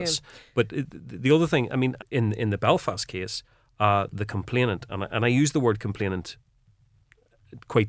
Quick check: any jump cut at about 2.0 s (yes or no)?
yes